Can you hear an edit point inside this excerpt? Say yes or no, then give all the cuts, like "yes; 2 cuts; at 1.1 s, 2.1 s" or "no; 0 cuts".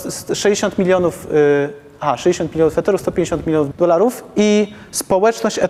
yes; 1 cut; at 3.7 s